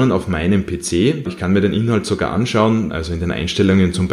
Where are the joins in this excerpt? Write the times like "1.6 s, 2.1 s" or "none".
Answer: 1.3 s, 2.9 s